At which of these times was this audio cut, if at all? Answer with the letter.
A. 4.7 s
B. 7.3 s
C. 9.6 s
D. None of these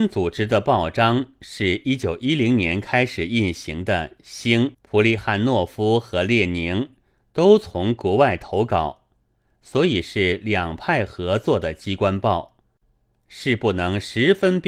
A